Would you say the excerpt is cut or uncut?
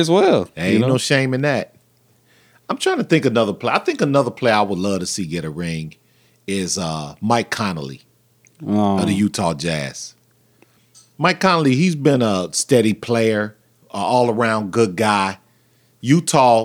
uncut